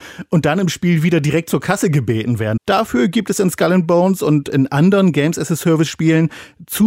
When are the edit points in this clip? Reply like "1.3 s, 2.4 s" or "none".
2.6 s